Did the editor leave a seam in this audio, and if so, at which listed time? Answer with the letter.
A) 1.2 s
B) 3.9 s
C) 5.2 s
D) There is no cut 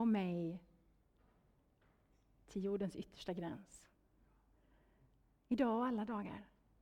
D